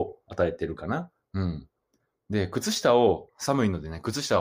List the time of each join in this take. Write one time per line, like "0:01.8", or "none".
0:01.2